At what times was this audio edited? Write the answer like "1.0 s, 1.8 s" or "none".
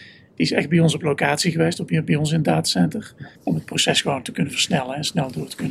3.4 s